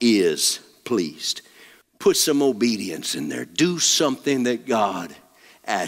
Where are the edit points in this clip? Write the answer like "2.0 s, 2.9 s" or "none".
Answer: 1.8 s